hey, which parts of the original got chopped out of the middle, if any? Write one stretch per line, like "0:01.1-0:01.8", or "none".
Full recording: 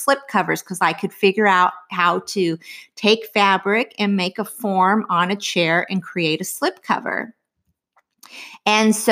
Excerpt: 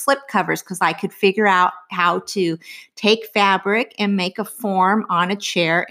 none

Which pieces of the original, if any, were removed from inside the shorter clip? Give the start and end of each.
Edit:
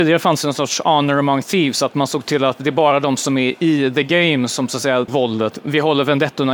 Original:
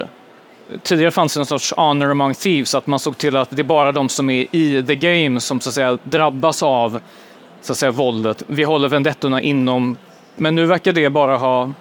0:06.0-0:07.9

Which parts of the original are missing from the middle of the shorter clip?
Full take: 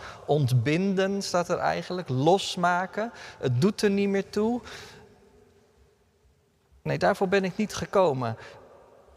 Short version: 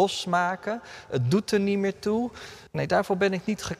0:05.0-0:06.8

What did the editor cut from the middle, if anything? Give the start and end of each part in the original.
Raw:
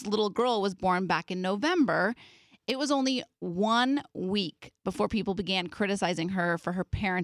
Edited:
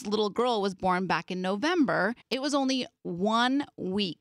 0:02.2-0:02.6

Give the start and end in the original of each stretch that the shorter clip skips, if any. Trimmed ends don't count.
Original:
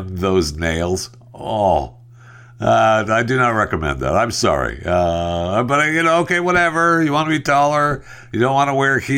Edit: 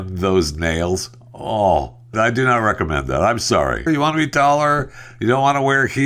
0:02.1-0:03.1
0:04.8-0:07.0

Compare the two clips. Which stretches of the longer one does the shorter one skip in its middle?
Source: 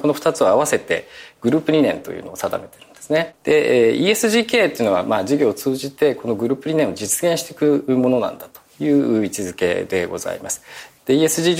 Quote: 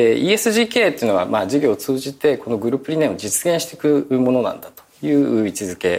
none

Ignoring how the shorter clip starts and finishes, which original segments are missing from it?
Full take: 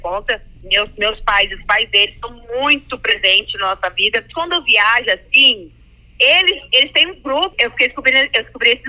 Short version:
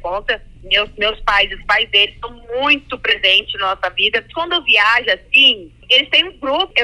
0:05.8-0:06.7

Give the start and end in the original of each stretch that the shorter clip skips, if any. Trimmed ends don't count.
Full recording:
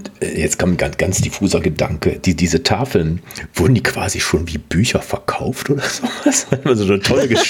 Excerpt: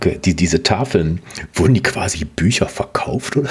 0:04.1-0:04.5

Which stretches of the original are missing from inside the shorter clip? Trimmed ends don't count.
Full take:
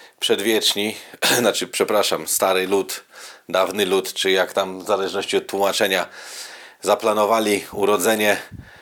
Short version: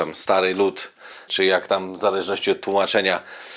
0:03.4-0:04.1

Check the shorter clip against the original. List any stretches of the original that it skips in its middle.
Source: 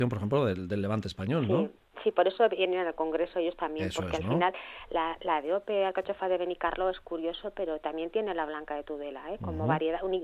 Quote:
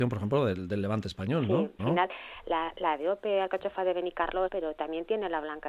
0:01.8-0:04.2
0:06.9-0:07.5

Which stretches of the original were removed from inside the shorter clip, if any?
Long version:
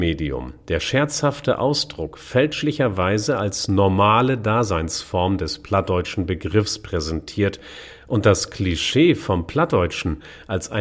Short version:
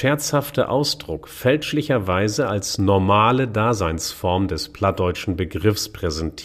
none

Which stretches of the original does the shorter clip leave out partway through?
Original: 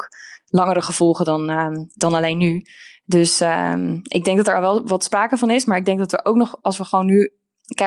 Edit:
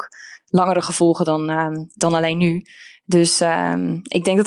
none

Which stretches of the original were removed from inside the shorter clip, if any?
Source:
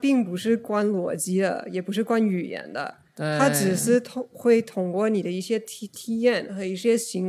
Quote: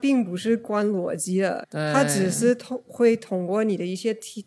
0:01.6-0:03.1

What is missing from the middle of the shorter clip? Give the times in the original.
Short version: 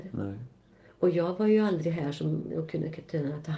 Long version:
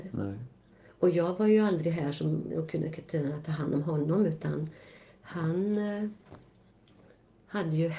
none

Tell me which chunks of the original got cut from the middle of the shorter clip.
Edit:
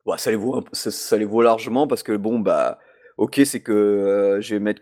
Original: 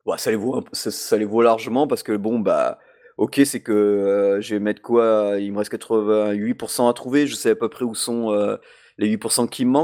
none

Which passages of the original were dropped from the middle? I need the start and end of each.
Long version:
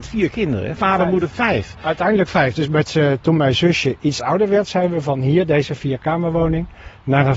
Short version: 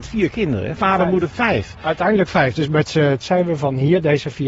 0:03.2-0:04.7

